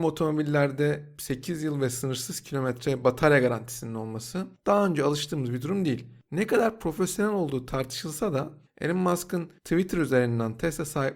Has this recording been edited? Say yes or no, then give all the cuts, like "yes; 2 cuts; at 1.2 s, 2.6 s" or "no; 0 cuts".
no; 0 cuts